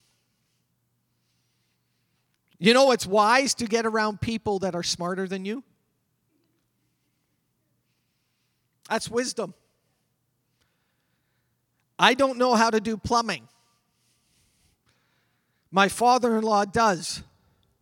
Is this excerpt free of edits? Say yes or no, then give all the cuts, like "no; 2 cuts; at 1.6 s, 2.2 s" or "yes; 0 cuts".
yes; 0 cuts